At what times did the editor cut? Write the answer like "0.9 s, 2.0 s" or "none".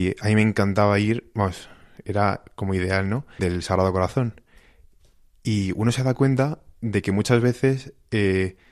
3.4 s